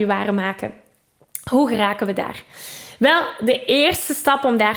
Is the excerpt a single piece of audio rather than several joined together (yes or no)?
yes